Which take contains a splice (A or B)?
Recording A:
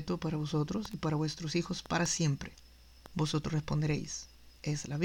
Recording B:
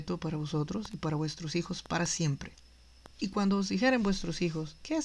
A